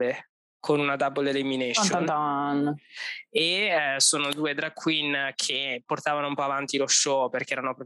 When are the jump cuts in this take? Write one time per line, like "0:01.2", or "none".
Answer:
none

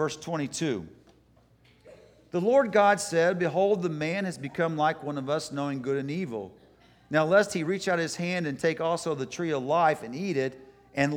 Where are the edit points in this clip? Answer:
none

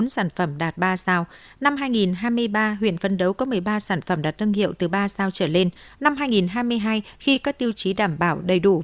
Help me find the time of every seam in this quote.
0:05.9

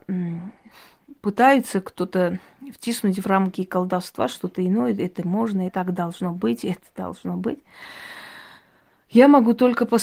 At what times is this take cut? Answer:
0:05.7

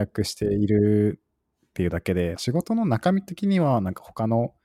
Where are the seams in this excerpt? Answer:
0:02.3

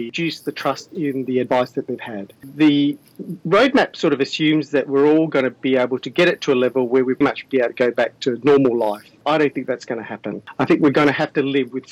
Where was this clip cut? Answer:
0:07.2

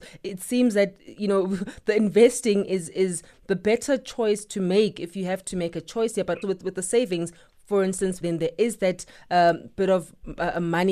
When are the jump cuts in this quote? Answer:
0:06.4
0:08.2

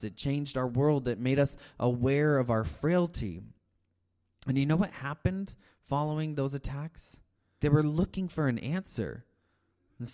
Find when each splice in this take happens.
0:07.6

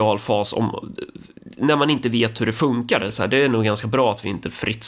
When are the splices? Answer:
0:03.1

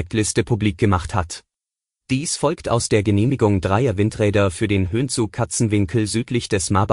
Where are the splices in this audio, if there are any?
0:02.0

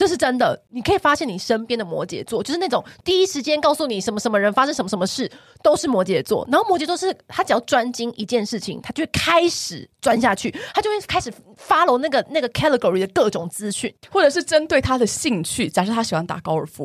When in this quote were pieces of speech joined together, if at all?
0:14.0

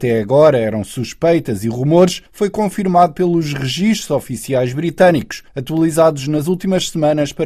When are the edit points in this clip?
none

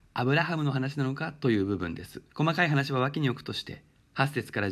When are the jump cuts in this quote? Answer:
0:02.3

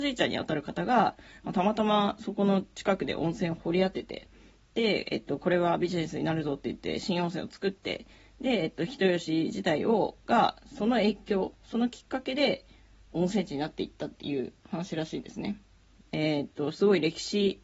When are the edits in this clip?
0:16.0

